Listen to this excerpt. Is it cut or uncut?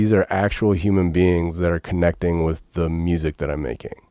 uncut